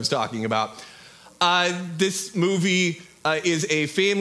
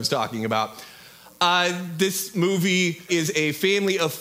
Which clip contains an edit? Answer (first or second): second